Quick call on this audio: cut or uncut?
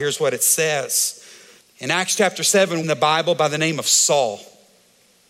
cut